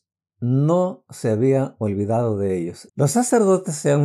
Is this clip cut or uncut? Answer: cut